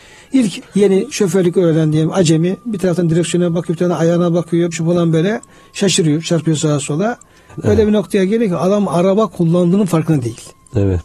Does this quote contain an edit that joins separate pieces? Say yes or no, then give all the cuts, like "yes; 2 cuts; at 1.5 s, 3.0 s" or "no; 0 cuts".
yes; 2 cuts; at 4.7 s, 7.5 s